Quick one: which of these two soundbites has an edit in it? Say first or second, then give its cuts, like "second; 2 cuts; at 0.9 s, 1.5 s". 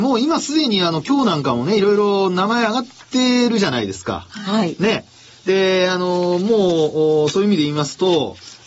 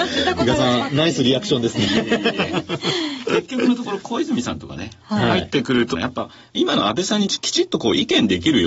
second; 1 cut; at 5.9 s